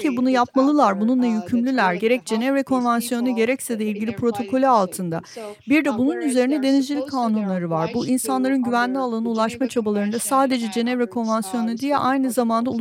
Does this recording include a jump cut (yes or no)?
no